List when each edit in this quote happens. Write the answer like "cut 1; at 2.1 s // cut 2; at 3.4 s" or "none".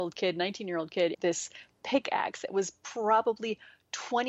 cut 1; at 1.1 s